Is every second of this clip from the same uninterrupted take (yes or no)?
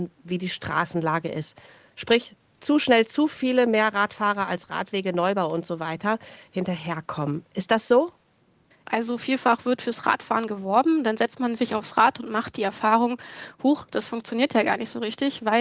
no